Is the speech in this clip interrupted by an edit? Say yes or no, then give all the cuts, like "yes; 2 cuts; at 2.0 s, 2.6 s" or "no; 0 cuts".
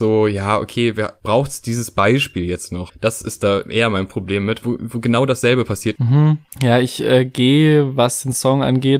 yes; 3 cuts; at 2.9 s, 4.6 s, 6.0 s